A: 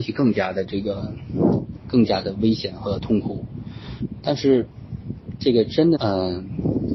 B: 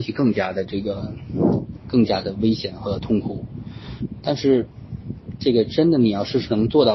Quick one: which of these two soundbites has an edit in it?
A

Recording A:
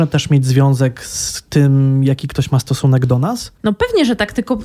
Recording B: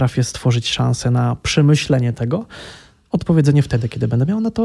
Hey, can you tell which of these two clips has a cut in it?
A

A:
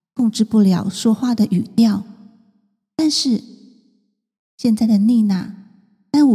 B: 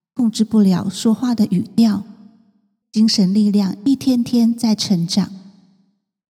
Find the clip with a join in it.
B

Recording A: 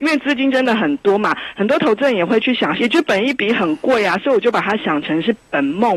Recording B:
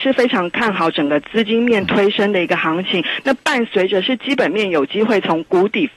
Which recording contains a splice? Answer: A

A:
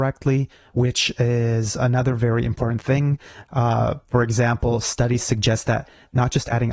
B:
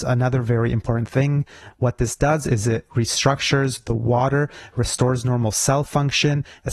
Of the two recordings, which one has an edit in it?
B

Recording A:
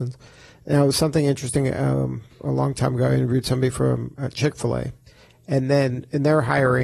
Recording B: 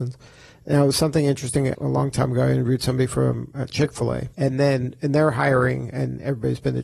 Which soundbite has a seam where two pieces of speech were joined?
B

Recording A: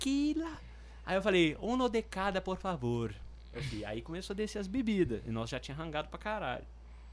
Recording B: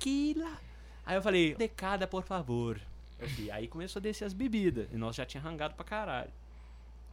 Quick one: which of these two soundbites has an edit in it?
B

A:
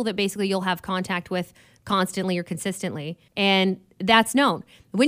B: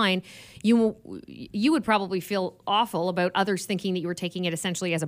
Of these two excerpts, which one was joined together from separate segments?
A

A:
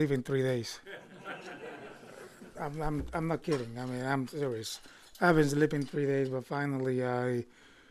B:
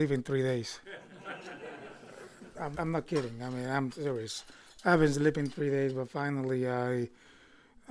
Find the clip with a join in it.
B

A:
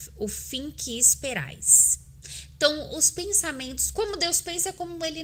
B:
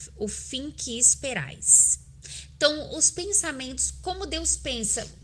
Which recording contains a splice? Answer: A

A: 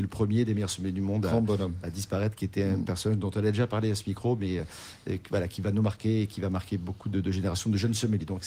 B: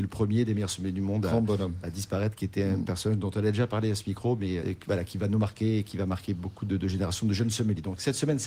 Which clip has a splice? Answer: B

